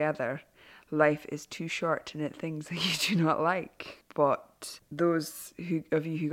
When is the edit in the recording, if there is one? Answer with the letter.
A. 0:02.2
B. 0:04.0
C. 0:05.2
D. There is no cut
B